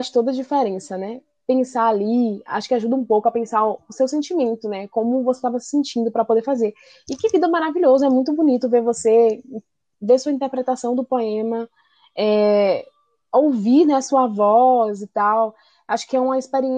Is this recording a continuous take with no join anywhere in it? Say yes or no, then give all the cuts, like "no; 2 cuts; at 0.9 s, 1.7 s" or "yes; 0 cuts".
yes; 0 cuts